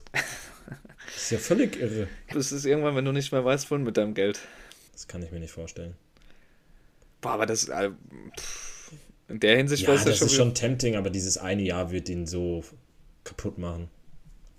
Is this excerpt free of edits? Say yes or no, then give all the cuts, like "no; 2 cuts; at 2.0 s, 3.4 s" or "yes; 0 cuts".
no; 2 cuts; at 2.3 s, 4.9 s